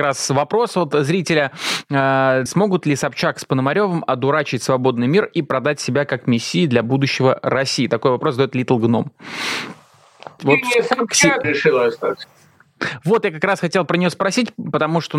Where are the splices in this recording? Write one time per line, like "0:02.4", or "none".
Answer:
0:02.5
0:10.4
0:11.4